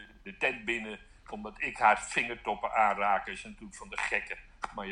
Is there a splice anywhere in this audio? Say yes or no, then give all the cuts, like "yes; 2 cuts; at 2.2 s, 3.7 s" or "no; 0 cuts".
no; 0 cuts